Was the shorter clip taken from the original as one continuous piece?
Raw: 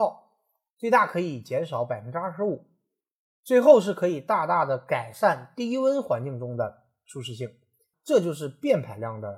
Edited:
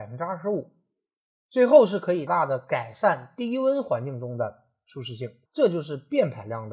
no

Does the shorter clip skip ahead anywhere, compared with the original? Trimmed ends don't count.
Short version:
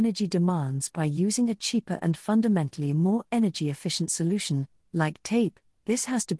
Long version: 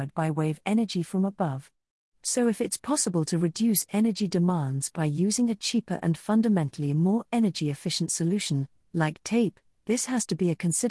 no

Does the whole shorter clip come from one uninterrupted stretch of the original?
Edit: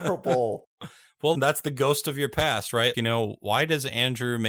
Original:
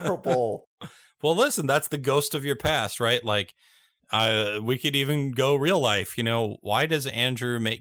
no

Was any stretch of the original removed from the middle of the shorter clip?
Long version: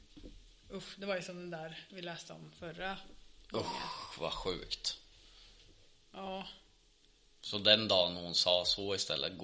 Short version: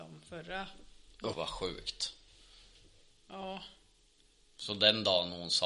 yes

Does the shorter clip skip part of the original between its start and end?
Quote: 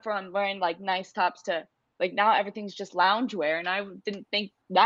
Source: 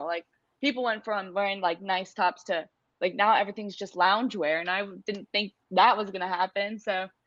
no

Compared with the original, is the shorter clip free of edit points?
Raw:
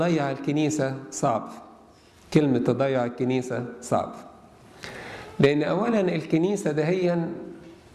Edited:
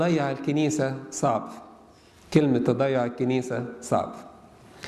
yes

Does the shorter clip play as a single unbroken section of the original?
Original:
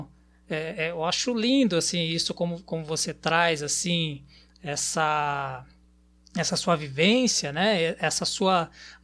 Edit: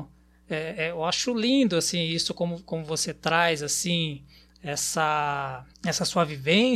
no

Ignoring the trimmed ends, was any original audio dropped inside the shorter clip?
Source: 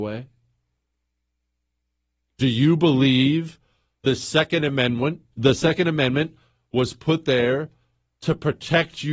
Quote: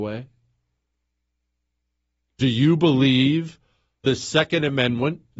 no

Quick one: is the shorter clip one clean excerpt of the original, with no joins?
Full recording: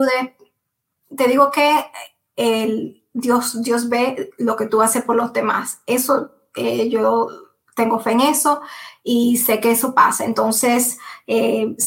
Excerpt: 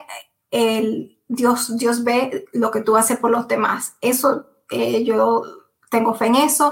yes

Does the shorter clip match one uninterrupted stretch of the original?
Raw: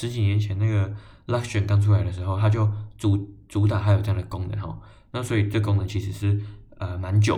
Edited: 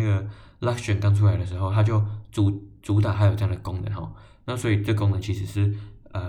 yes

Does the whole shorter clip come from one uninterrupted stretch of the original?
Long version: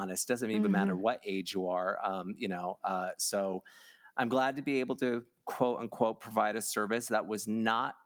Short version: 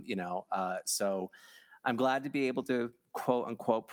yes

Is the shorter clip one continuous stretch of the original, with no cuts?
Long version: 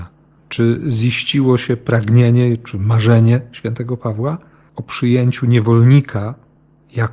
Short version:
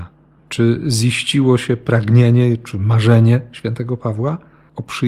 yes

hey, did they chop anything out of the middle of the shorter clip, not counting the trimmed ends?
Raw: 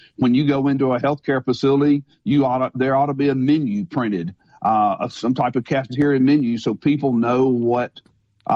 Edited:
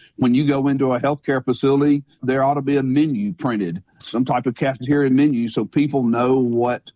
yes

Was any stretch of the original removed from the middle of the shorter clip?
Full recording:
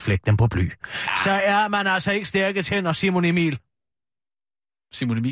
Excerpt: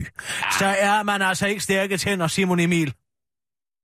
no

